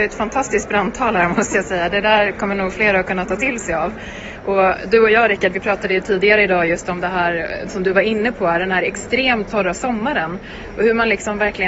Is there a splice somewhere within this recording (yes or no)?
no